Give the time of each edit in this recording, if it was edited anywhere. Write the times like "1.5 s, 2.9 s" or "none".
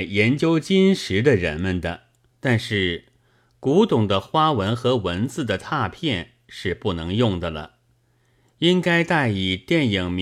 2.3 s